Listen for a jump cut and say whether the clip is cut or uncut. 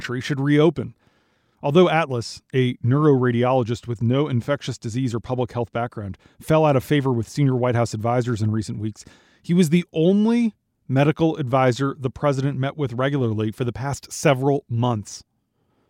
uncut